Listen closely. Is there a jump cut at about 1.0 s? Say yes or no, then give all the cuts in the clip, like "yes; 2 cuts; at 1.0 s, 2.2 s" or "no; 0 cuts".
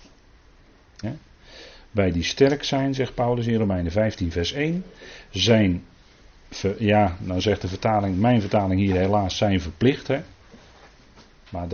yes; 1 cut; at 1.0 s